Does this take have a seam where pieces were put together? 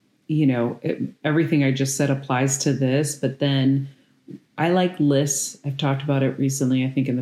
no; 0 cuts

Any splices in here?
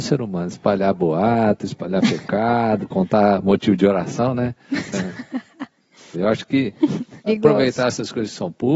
yes; 3 cuts; at 4.9 s, 6.1 s, 7.3 s

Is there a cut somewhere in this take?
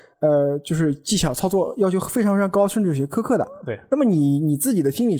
no; 0 cuts

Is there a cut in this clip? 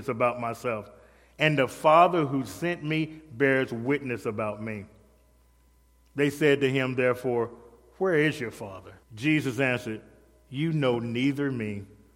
yes; 1 cut; at 9.0 s

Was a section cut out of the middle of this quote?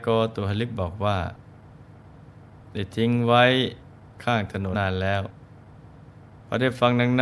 yes; 1 cut; at 4.7 s

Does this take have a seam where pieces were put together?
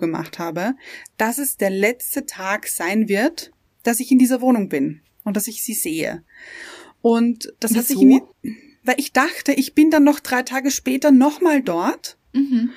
yes; 1 cut; at 8.3 s

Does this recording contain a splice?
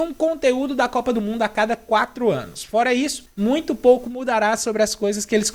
no; 0 cuts

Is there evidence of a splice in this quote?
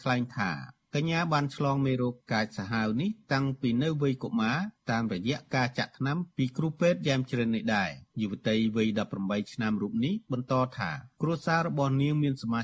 yes; 1 cut; at 8.1 s

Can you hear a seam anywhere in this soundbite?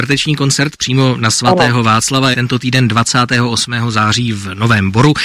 yes; 1 cut; at 2.3 s

